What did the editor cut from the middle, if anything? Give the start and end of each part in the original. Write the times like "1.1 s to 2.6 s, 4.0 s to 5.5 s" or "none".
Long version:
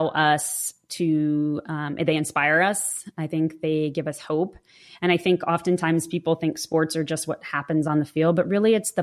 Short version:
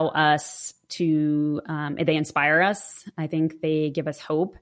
none